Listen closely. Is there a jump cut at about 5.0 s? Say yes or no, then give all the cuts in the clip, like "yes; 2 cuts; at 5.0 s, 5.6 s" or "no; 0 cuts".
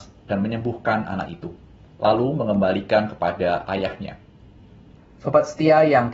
yes; 1 cut; at 5.0 s